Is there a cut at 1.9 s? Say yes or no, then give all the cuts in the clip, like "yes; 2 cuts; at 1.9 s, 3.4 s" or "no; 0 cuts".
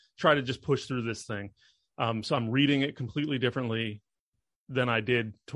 yes; 1 cut; at 1.9 s